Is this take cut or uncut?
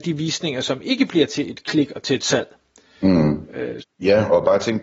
cut